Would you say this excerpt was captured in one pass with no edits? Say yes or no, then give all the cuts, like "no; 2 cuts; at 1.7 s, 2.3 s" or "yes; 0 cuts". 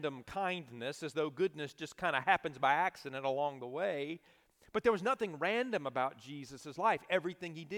yes; 0 cuts